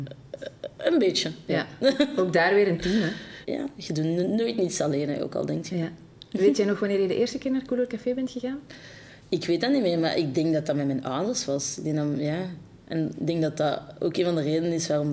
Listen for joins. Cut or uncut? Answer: cut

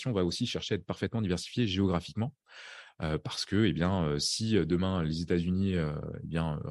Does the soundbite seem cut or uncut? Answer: uncut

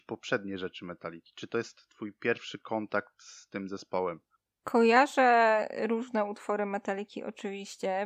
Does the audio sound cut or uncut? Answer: uncut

